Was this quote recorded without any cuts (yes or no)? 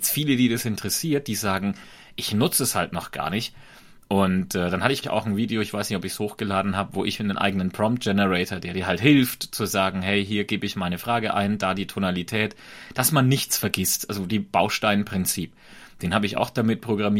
no